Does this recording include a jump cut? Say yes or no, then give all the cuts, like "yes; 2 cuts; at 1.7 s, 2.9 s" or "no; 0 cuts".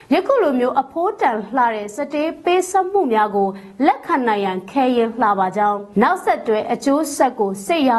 yes; 1 cut; at 5.9 s